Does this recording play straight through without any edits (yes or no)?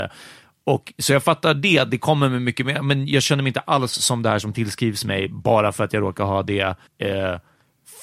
no